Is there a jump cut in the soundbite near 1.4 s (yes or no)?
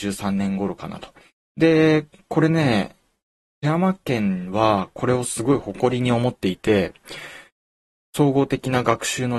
yes